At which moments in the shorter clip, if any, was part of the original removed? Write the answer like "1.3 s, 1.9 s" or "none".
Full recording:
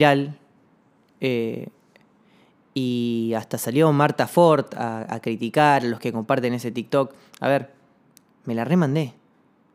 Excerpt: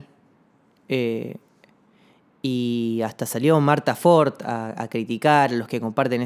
none